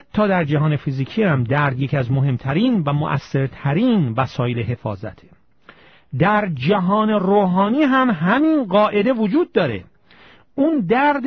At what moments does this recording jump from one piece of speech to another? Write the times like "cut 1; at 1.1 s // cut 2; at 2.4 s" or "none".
none